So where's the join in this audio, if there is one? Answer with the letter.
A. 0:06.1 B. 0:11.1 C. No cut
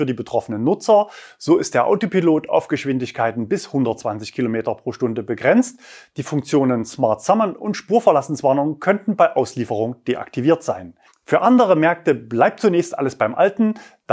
B